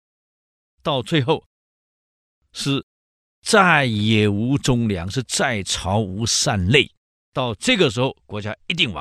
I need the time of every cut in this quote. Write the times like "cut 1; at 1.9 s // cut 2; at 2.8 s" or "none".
none